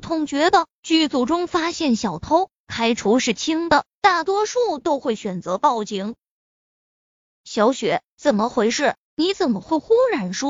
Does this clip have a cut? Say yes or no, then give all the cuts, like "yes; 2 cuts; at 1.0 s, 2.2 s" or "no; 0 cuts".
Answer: no; 0 cuts